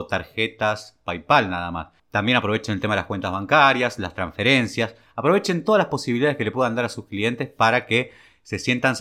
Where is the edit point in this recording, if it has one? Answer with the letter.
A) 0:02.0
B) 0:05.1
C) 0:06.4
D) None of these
A